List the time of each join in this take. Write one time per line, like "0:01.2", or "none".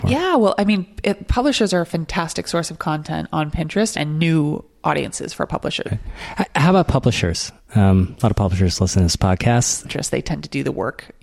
0:03.9
0:05.9
0:09.8